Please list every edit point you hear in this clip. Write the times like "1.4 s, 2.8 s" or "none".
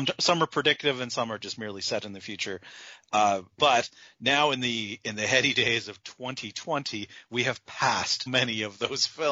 3.5 s, 8.3 s